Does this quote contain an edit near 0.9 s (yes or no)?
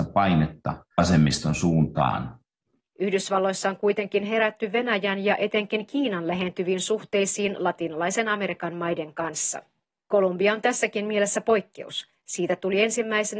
yes